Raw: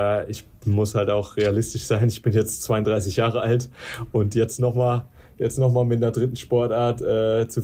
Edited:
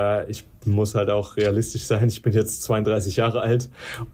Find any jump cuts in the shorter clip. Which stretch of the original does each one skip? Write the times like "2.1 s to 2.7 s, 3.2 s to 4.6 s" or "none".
none